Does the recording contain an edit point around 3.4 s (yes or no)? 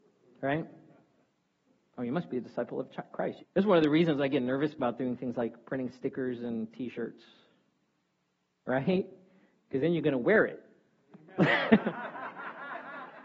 yes